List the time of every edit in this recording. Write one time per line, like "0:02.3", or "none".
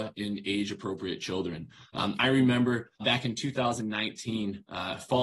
0:03.0